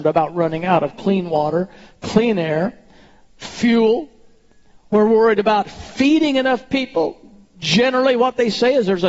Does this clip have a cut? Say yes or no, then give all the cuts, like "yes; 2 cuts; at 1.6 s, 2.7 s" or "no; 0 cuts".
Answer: no; 0 cuts